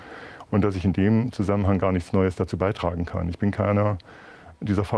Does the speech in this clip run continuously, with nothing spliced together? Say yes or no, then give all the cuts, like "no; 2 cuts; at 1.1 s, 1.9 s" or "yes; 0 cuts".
yes; 0 cuts